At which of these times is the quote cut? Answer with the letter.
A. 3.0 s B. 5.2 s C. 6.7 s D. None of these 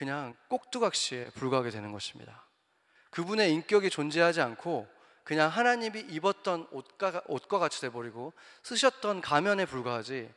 A